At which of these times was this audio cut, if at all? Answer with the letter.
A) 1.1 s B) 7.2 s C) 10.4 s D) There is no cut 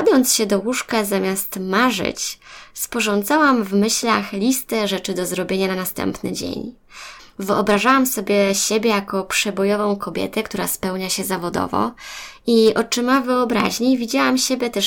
B